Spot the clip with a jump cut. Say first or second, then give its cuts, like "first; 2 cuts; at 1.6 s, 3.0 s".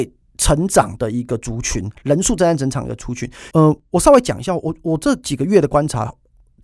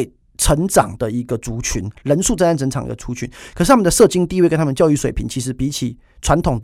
first; 1 cut; at 3.5 s